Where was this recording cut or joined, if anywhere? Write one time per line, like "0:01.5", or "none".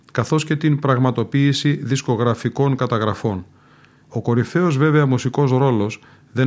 0:04.0